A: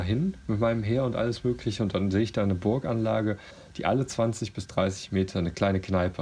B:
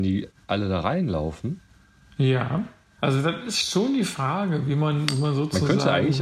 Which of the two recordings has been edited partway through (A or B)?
B